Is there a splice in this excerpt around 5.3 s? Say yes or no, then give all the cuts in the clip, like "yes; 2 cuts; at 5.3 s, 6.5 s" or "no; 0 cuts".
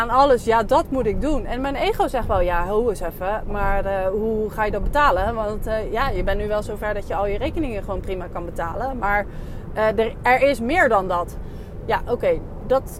no; 0 cuts